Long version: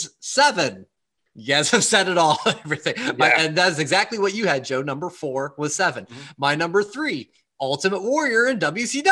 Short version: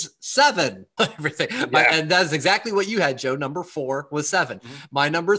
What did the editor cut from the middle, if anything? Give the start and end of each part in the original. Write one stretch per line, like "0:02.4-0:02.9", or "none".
0:01.0-0:02.4